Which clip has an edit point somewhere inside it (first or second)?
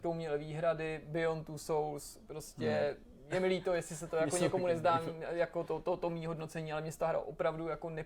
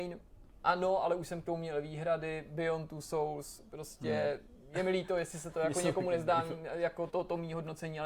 second